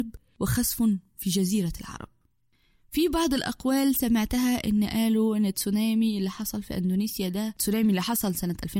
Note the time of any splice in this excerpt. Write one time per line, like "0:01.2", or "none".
none